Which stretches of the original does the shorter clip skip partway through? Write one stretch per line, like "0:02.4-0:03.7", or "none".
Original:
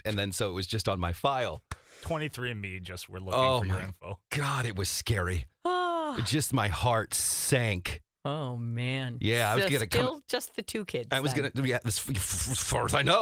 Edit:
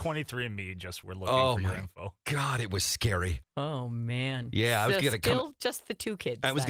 0:05.5-0:08.1